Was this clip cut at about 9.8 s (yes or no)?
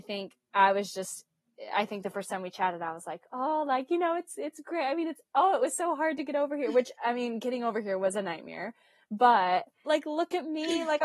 yes